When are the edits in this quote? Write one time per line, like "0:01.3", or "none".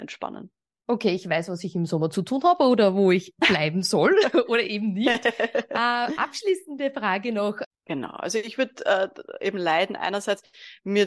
0:07.7